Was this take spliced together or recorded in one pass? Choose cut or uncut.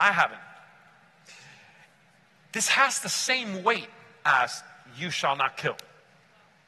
uncut